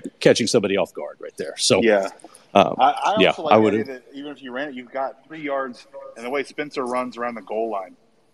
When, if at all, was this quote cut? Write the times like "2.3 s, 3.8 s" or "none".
none